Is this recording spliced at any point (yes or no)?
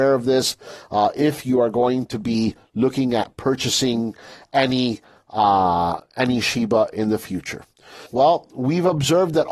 yes